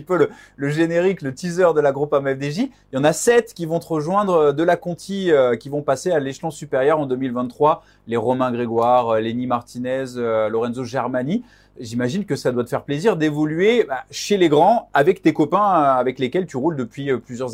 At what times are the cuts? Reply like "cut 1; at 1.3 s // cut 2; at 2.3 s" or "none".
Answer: none